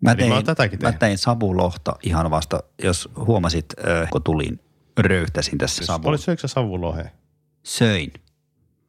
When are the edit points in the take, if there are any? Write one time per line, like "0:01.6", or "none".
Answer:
0:04.1
0:05.8